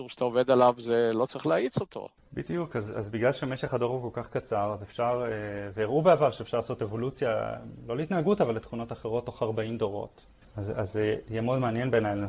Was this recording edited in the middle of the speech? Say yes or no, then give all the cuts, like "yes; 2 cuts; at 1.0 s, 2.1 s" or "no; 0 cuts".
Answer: no; 0 cuts